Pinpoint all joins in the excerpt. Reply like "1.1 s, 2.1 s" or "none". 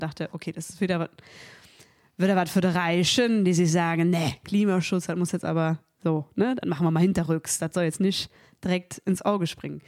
none